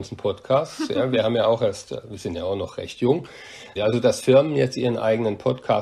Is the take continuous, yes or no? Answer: no